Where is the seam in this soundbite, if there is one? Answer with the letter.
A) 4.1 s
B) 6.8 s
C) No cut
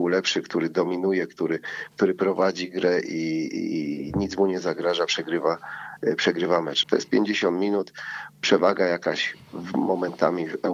B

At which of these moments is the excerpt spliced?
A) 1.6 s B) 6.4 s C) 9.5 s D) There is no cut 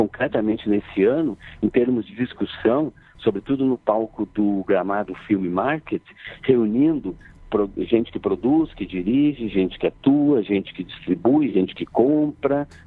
D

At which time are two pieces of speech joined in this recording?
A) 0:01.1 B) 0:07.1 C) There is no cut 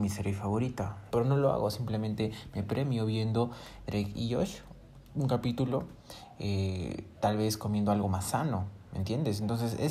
A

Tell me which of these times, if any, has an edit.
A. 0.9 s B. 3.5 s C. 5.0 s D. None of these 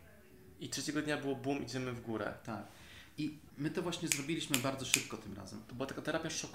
B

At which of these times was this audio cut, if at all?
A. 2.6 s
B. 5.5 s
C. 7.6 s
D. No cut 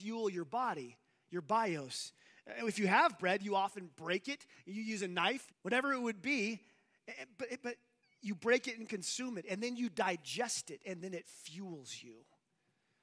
B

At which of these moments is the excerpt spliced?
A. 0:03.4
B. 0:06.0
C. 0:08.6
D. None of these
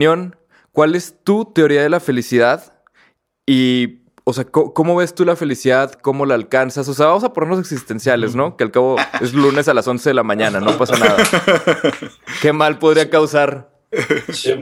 B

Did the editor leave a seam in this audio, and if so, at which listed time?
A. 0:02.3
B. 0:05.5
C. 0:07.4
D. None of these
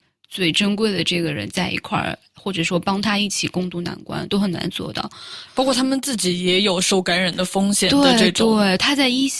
B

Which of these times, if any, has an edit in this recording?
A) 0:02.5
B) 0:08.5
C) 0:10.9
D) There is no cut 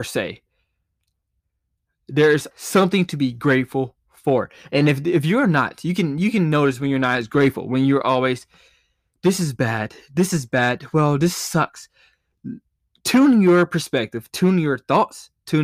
A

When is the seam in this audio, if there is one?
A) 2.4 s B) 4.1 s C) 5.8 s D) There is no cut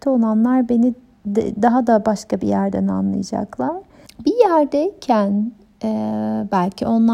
B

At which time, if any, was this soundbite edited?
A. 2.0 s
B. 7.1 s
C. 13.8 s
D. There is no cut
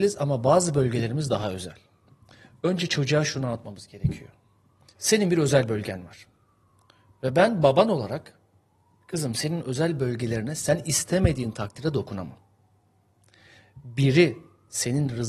D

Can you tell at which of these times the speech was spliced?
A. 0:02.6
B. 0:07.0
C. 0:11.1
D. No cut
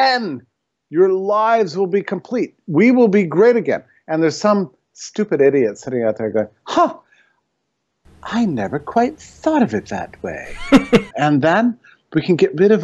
C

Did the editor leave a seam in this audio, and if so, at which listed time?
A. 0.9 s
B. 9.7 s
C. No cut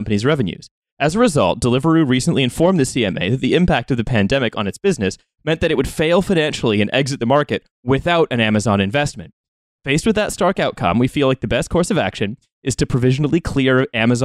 B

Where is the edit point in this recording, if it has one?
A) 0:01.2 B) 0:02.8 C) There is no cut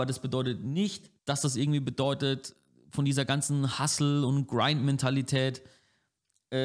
A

